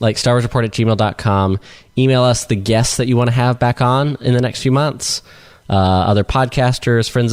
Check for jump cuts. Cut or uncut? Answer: uncut